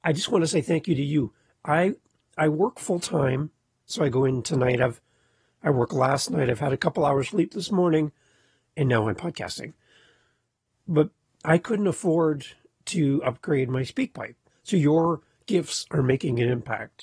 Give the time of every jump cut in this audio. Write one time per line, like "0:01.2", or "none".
0:03.8
0:14.5